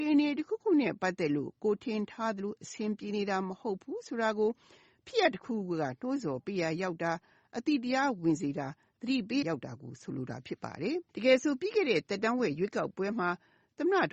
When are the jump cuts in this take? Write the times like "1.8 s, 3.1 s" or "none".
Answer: 9.4 s, 11.1 s

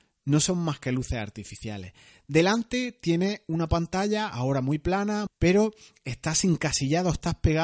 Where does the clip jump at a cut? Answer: 5.3 s

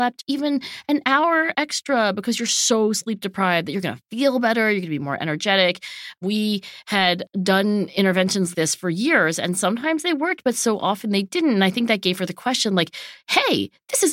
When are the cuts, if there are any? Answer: 8.5 s

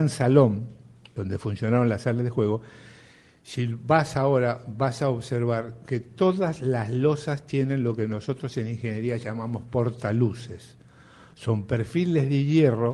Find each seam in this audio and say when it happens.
none

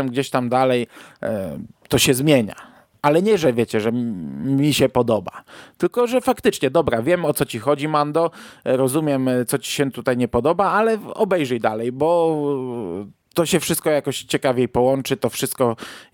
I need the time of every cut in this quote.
none

